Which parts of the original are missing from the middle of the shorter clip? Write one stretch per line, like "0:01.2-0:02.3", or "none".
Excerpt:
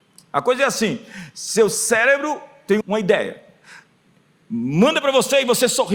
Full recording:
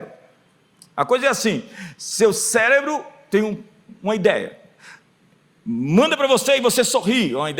0:03.4-0:04.0